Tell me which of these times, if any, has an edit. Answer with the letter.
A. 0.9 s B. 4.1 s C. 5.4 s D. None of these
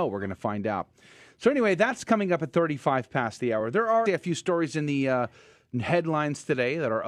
B